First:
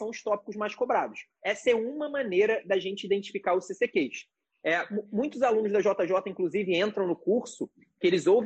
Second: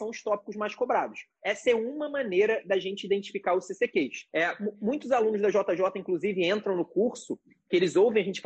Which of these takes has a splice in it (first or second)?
second